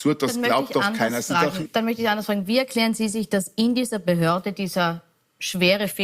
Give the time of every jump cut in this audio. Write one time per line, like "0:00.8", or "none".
0:01.6